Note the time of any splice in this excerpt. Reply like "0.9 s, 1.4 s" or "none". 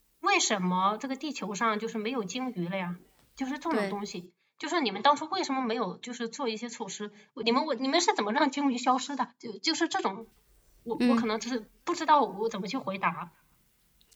none